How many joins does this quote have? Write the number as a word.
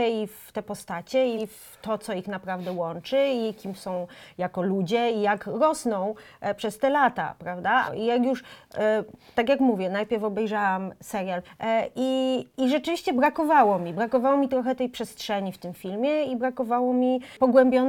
three